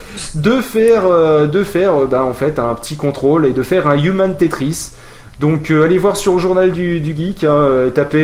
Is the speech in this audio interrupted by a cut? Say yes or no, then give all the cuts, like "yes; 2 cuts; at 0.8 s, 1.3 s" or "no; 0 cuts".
no; 0 cuts